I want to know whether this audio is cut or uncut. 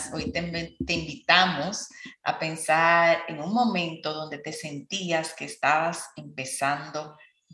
uncut